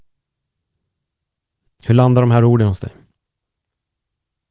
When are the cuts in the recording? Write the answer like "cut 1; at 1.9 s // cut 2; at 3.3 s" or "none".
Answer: cut 1; at 1.7 s